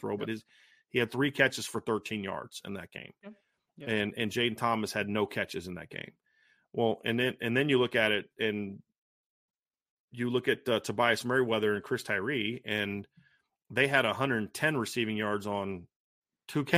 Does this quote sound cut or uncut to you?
uncut